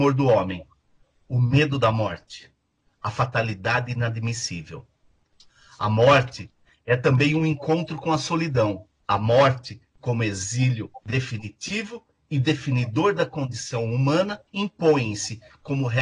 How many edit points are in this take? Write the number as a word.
three